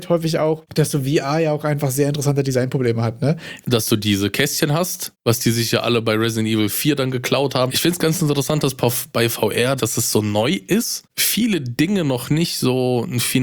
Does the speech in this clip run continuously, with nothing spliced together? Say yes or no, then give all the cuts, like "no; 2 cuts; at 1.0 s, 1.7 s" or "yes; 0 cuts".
no; 3 cuts; at 3.6 s, 7.7 s, 9.8 s